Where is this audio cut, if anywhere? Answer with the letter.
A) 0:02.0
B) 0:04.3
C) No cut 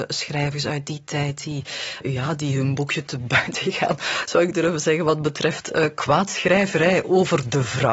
C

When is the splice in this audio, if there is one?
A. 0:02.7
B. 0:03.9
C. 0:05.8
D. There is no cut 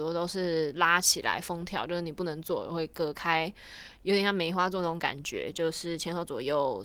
D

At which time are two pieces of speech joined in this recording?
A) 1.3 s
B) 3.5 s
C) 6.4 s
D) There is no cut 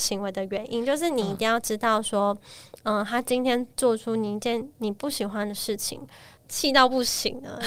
C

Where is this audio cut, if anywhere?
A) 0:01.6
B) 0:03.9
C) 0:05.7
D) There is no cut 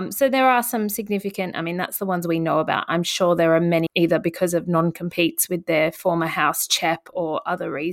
B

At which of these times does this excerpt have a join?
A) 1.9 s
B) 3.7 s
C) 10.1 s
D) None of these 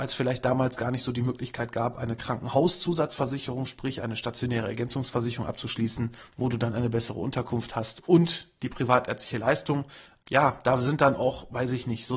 D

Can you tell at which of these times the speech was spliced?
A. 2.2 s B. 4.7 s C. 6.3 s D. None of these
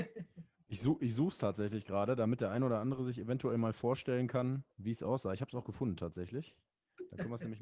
B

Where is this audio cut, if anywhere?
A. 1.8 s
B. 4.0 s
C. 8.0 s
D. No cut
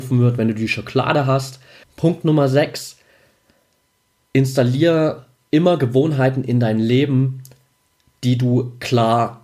A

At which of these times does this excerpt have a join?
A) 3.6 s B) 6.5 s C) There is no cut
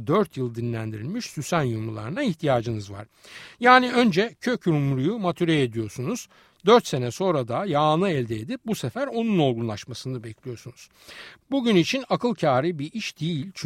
C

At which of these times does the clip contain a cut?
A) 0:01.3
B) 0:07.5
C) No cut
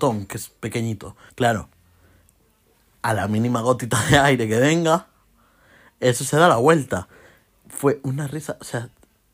A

